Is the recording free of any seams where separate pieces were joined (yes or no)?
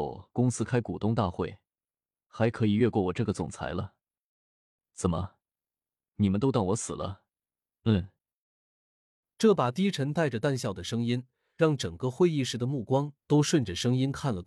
yes